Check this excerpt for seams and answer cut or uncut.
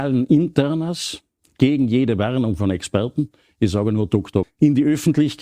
cut